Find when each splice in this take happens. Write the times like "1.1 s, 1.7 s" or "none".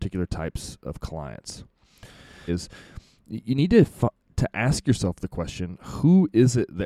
2.5 s